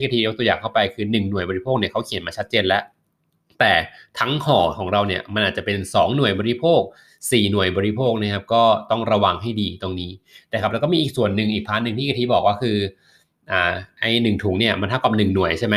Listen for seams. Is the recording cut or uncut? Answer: uncut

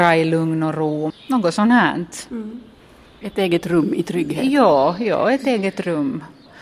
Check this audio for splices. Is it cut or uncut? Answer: uncut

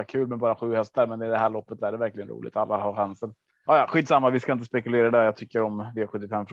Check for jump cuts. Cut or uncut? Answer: cut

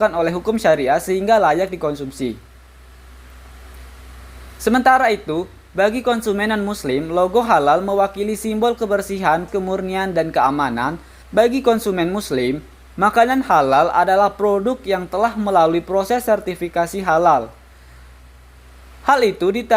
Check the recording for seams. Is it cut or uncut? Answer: cut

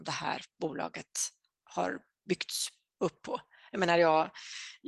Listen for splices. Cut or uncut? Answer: uncut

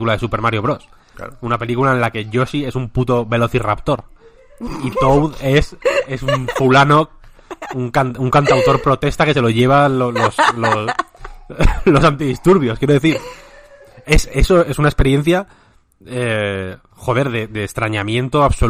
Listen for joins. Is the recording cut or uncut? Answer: uncut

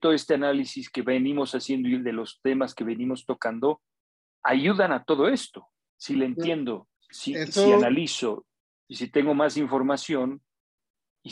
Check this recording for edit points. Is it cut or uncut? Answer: cut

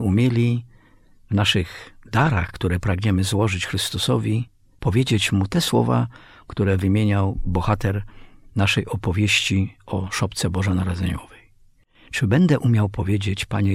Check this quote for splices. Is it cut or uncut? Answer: uncut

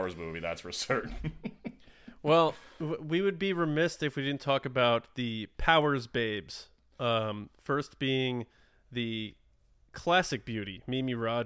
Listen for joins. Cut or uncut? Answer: uncut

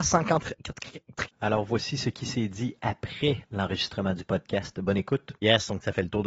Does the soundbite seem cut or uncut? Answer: cut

